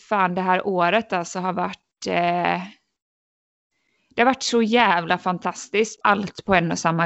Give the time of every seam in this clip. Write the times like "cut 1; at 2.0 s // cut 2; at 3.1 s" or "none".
cut 1; at 6.0 s